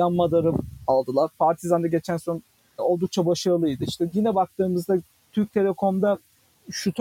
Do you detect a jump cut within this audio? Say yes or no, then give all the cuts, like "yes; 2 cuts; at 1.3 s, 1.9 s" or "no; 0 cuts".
no; 0 cuts